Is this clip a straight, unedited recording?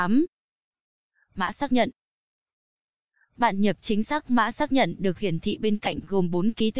no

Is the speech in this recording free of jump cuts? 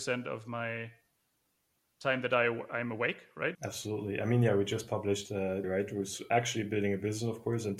no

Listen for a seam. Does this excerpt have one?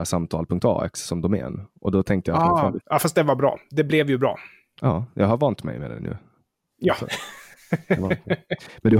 yes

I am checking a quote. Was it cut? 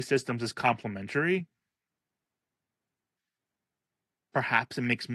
no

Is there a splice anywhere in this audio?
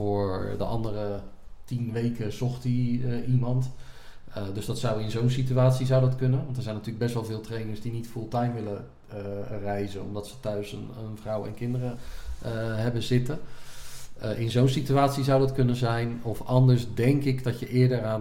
no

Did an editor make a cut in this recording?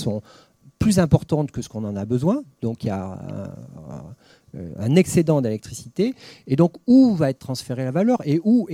no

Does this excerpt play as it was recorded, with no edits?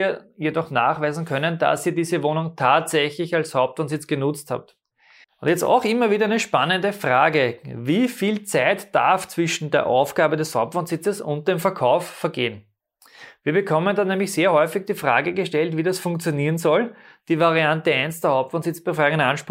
no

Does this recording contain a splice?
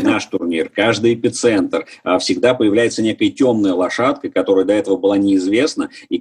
no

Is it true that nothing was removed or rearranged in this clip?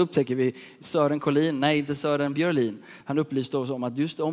yes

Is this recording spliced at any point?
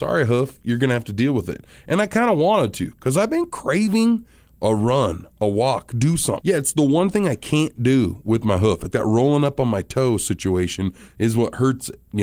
yes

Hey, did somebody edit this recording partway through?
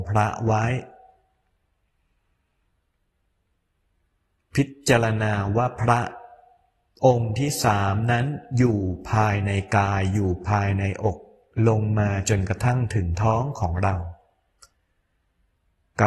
no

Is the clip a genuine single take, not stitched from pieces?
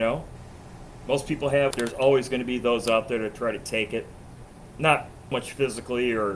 no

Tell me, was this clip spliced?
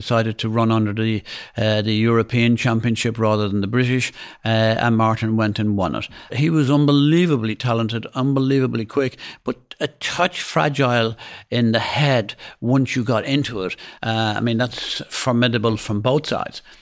yes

